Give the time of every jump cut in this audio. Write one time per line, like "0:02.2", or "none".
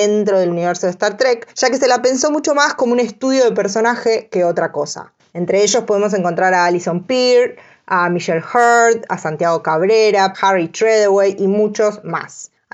0:05.2
0:10.3